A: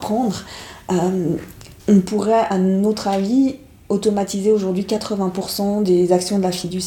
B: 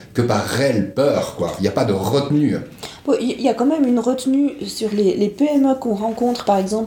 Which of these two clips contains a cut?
A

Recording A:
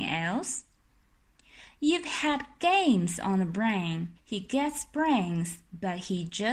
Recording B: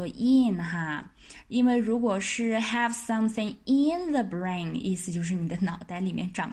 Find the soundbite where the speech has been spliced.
A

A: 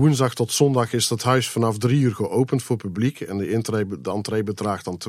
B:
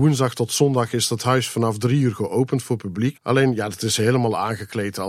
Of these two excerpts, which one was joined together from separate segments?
B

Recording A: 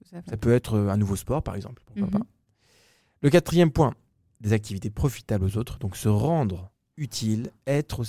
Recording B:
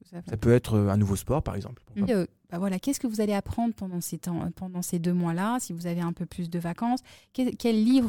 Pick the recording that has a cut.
B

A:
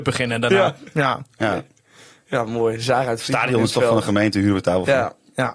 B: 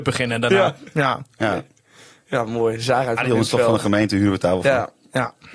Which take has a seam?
B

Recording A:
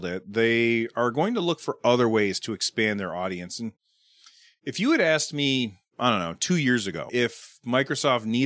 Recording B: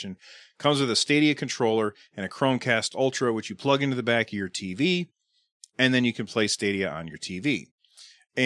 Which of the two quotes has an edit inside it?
A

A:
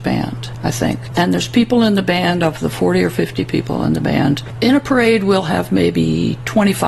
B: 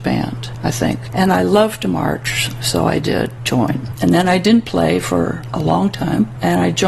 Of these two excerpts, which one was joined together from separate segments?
B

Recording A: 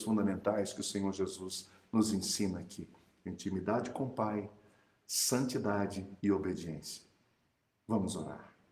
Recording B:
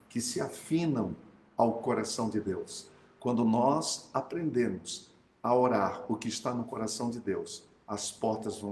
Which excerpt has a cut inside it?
A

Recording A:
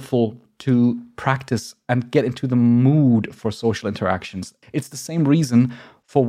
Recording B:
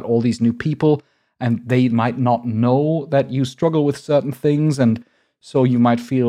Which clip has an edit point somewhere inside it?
A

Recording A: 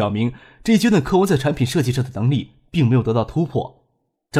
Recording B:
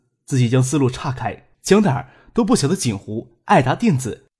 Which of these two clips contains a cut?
B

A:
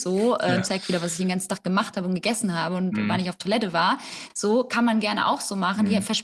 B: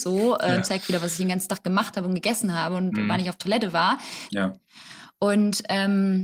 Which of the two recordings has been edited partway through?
B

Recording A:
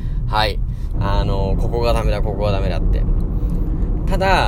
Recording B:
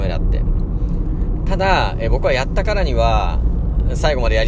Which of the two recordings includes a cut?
A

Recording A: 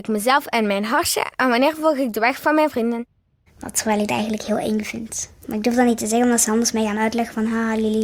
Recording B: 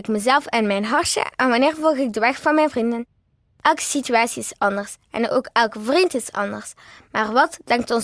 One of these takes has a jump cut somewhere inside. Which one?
A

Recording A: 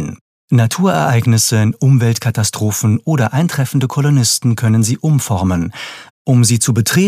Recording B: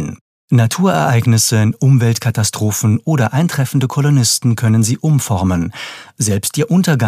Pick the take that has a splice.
A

